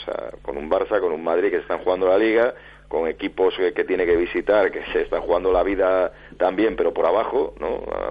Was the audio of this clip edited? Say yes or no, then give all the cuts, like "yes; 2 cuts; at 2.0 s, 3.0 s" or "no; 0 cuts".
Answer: no; 0 cuts